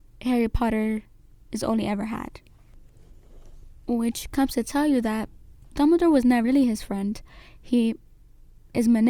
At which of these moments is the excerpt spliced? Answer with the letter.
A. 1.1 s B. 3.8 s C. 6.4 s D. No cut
C